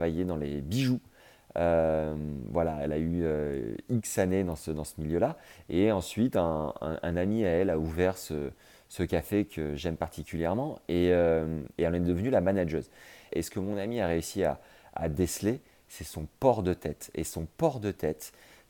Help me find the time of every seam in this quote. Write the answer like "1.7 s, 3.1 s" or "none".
13.3 s

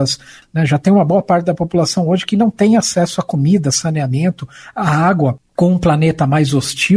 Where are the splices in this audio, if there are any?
none

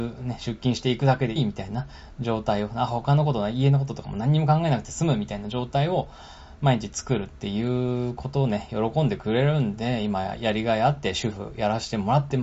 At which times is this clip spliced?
1.4 s

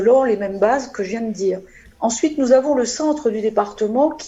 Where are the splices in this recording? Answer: none

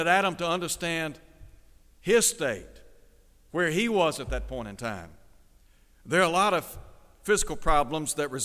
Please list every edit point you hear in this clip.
5.9 s

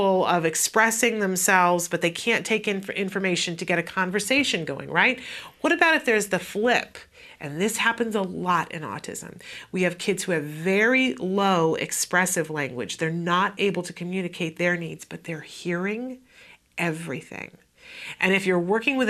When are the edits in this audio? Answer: 18.2 s

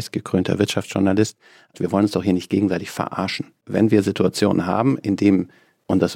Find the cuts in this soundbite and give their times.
1.7 s, 3.6 s

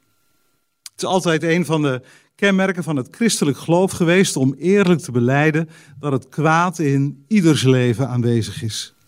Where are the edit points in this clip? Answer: none

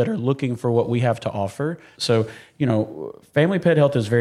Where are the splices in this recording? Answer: 1.9 s

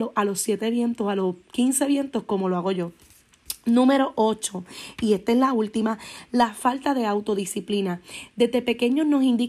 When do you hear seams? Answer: none

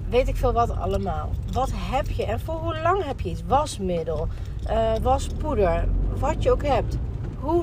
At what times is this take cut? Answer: 5.0 s

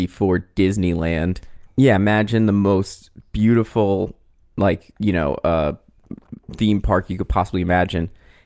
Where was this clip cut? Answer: 1.7 s

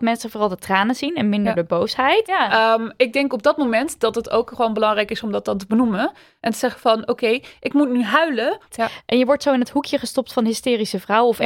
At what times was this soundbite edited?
2.2 s, 8.7 s

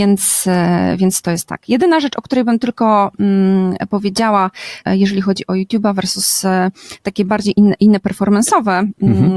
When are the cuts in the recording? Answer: 4.8 s

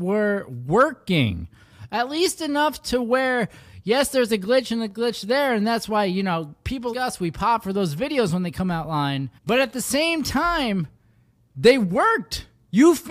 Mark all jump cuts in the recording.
6.9 s, 9.4 s

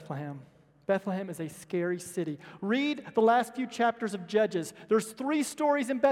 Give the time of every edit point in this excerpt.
none

